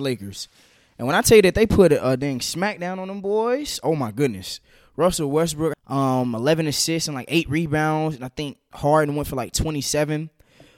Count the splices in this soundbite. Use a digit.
1